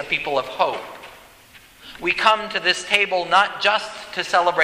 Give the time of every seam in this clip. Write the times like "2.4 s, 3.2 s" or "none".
none